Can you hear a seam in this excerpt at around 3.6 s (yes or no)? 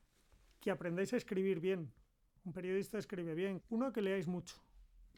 yes